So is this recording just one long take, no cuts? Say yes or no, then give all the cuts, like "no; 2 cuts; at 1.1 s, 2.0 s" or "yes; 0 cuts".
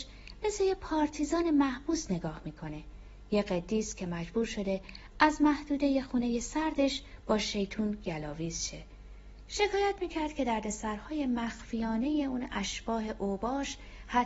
yes; 0 cuts